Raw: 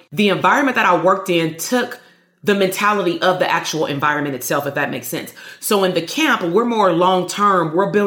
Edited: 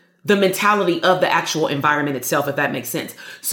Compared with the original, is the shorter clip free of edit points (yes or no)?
yes